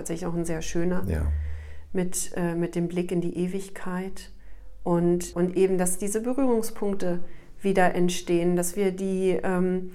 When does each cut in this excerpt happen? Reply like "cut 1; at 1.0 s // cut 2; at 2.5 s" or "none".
cut 1; at 5.3 s